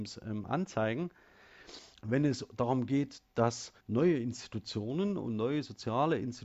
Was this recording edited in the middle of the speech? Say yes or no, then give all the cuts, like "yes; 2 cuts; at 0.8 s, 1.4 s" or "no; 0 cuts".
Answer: yes; 2 cuts; at 1.9 s, 3.8 s